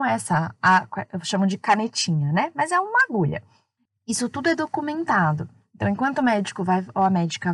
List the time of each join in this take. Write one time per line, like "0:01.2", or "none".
0:03.9